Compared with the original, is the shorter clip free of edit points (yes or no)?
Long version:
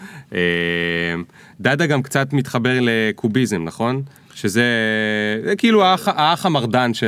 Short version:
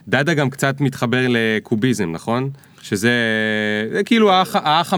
yes